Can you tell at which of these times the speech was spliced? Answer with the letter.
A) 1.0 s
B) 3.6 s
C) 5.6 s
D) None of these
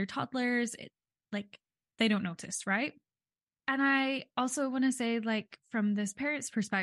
B